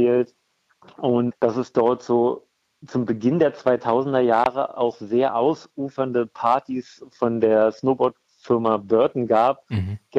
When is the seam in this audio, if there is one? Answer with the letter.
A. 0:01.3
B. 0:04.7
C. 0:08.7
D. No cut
A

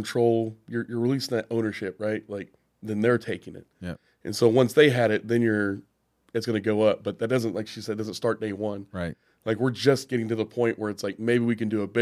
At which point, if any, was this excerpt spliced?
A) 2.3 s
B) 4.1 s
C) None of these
C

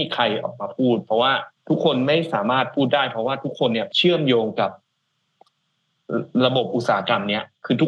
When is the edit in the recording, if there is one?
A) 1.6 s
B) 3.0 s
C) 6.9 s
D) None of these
A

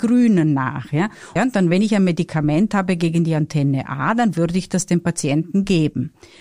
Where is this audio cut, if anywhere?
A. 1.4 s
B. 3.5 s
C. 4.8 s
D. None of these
A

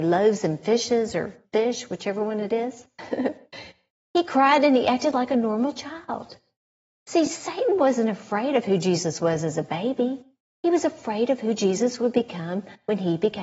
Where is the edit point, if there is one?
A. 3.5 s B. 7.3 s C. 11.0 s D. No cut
D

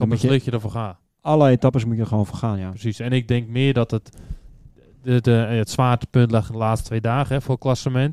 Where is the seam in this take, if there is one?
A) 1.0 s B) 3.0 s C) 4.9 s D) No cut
D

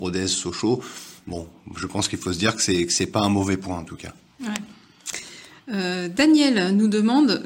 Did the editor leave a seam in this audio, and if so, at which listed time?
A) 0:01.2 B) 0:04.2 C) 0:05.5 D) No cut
D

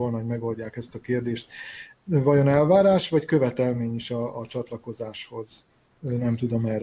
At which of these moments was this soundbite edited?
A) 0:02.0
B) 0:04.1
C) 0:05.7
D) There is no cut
D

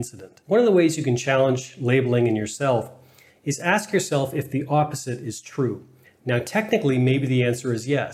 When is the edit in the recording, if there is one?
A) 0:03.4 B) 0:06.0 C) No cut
B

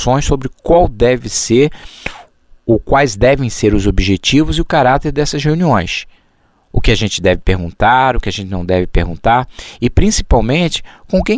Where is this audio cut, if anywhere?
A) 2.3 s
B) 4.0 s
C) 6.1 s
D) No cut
D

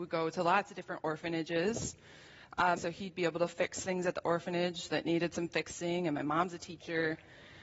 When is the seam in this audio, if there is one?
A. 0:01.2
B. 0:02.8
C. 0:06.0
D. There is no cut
B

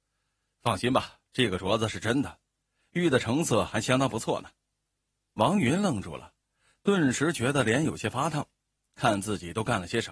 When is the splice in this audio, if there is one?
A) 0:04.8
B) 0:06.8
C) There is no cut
C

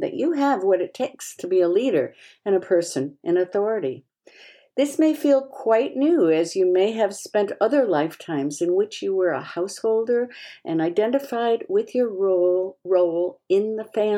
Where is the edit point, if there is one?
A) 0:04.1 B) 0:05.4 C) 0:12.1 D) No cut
D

